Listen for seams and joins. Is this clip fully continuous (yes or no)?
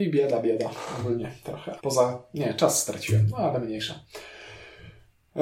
no